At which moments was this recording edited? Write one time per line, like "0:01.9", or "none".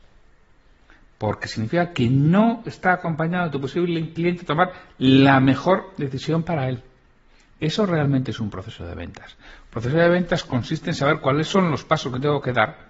none